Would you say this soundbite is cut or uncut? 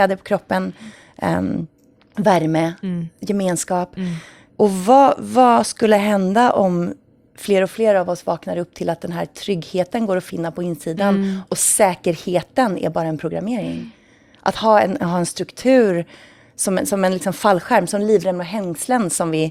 uncut